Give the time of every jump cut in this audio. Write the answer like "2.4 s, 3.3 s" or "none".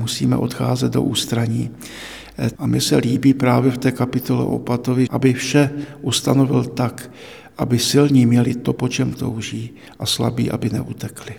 2.5 s, 5.1 s